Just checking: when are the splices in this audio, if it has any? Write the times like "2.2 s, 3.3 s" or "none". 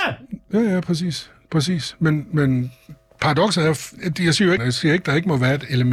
4.6 s